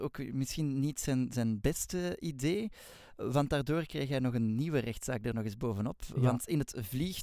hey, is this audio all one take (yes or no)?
yes